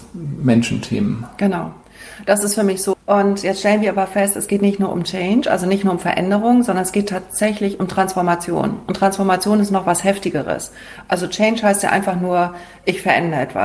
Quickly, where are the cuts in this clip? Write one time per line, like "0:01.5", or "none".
0:02.9